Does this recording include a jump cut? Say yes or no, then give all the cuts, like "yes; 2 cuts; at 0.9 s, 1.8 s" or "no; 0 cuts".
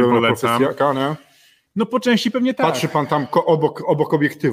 no; 0 cuts